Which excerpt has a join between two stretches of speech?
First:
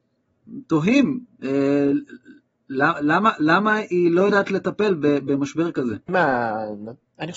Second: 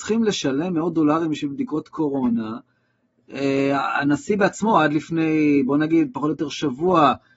first; 1 cut; at 6.1 s

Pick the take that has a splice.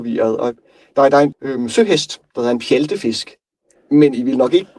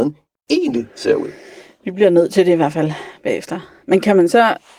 first; 2 cuts; at 1.3 s, 3.8 s

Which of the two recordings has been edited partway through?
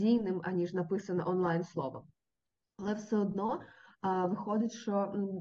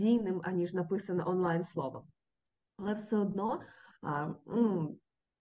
second; 1 cut; at 3.9 s

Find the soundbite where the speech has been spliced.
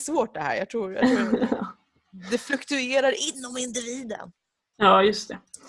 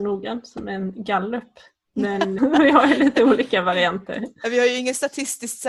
second; 1 cut; at 2.4 s

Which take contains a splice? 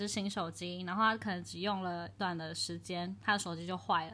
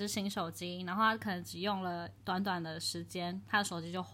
first; 1 cut; at 2.2 s

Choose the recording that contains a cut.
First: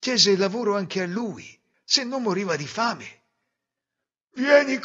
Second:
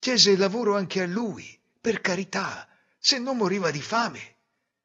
first; 1 cut; at 1.7 s

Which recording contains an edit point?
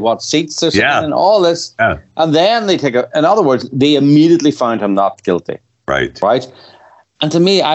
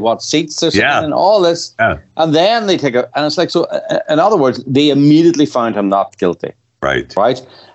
first; 1 cut; at 3.1 s

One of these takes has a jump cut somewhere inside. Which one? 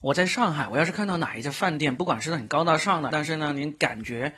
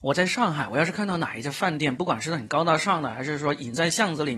first; 1 cut; at 3.1 s

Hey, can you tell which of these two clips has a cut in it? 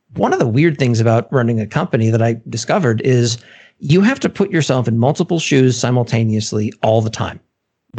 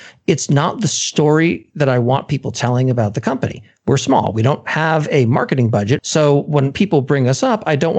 second; 1 cut; at 6.0 s

